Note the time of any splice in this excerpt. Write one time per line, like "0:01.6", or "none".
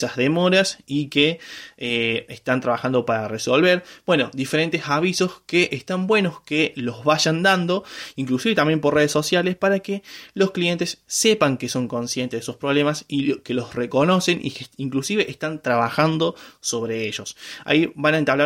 none

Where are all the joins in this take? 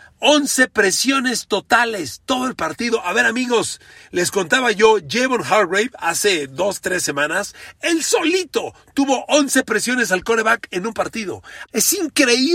0:11.6

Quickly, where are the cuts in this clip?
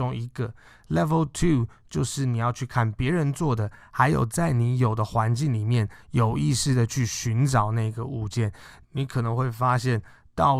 none

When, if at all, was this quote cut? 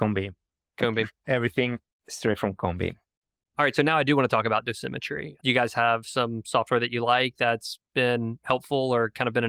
none

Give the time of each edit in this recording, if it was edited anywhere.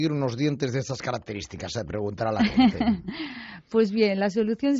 none

